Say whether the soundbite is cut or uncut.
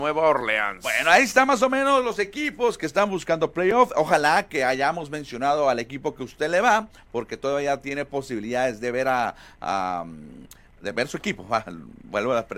uncut